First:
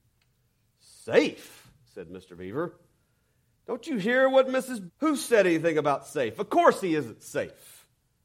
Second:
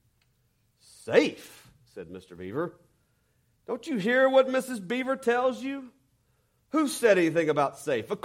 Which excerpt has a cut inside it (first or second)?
first